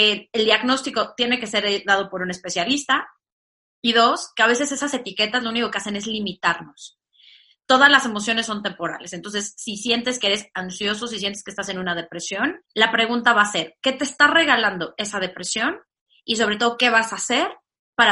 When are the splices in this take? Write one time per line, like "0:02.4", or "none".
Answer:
0:12.6